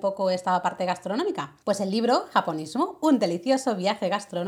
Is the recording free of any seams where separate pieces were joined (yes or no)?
no